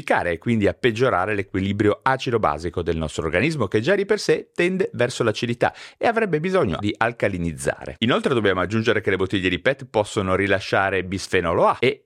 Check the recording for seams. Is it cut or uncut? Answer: cut